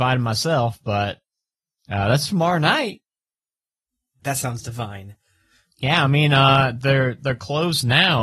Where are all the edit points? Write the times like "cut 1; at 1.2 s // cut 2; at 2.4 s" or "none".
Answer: cut 1; at 4.2 s

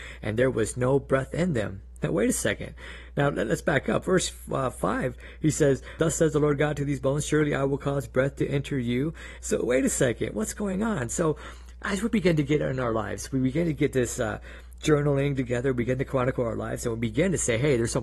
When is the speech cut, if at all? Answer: cut 1; at 9.4 s

